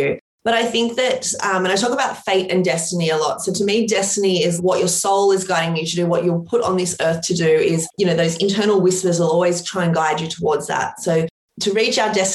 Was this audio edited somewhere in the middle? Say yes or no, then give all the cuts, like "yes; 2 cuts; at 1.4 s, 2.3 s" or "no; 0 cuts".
yes; 1 cut; at 4.6 s